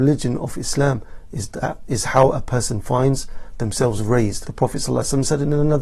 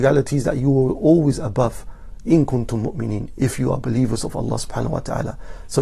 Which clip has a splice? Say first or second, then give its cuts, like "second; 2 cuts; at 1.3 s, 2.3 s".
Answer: first; 1 cut; at 4.4 s